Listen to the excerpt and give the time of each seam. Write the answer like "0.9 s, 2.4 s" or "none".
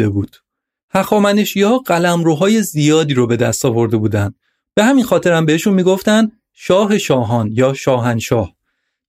4.6 s

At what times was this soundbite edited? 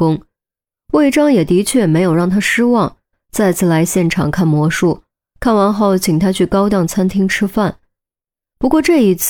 none

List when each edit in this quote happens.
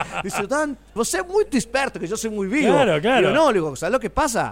1.0 s

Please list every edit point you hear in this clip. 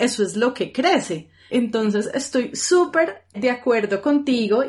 1.5 s, 3.3 s

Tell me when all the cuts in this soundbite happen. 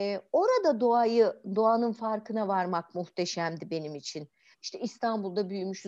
4.5 s

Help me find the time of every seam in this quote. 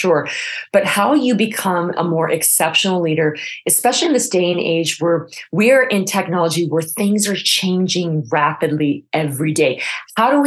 none

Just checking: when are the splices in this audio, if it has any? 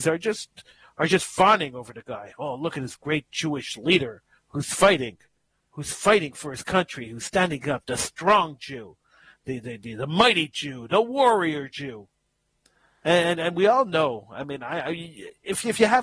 4.4 s

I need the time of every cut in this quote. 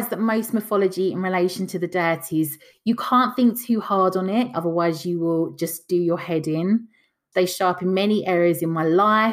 4.5 s, 7.3 s

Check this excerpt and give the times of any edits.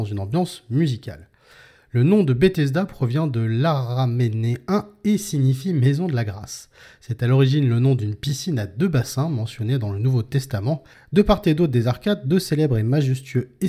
10.9 s

